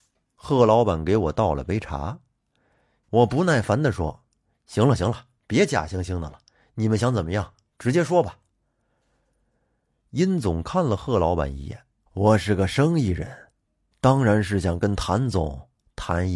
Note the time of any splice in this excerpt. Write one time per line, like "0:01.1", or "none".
0:12.1